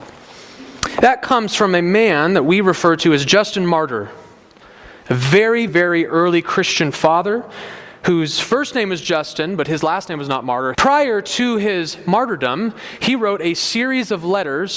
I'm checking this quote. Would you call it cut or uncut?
cut